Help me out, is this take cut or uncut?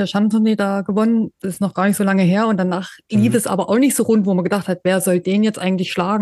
uncut